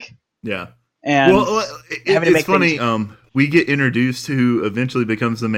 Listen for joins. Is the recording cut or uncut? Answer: cut